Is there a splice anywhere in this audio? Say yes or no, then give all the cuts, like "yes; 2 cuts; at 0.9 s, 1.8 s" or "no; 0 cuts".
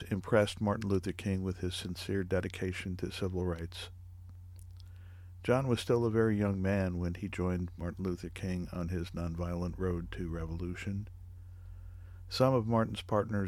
no; 0 cuts